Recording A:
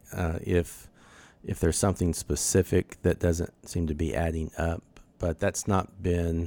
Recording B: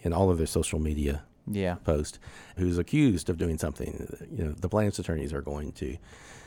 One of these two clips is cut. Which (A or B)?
B